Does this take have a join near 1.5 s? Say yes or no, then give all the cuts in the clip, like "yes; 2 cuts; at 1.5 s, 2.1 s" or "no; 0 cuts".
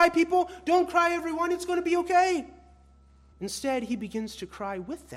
no; 1 cut; at 3.3 s